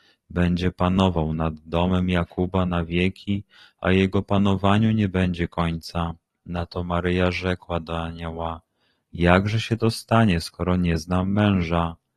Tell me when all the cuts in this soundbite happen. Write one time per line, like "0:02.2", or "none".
none